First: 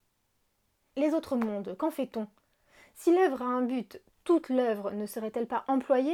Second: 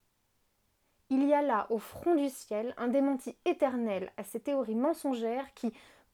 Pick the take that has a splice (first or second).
first